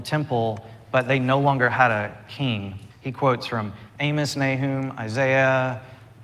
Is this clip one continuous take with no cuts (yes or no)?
no